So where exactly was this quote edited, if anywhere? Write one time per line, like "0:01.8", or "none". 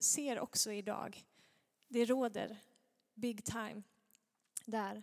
none